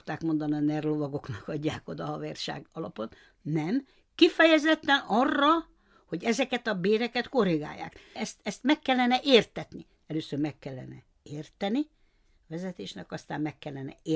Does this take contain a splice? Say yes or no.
yes